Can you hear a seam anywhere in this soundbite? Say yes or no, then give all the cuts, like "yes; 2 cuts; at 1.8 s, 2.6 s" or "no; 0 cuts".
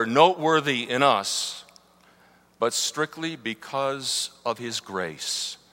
no; 0 cuts